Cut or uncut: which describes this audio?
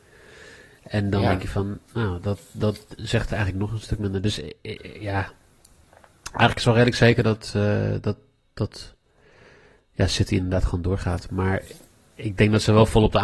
uncut